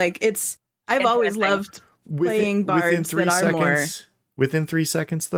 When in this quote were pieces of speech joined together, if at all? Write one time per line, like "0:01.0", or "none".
none